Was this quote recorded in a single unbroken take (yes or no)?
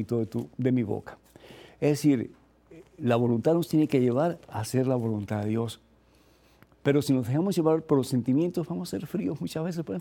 yes